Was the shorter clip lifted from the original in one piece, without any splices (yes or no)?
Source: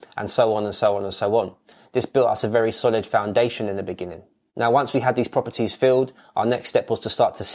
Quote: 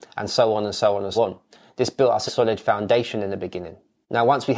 no